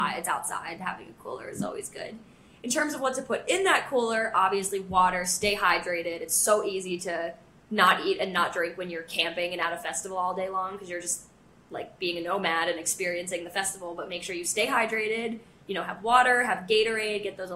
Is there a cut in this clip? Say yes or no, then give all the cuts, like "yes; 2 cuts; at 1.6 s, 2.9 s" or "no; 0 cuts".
no; 0 cuts